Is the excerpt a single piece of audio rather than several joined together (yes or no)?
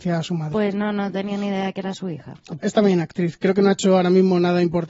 no